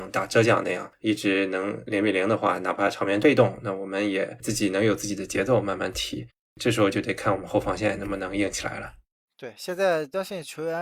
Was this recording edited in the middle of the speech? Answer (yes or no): no